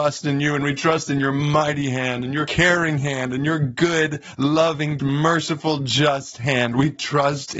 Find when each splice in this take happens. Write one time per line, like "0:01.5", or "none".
0:05.0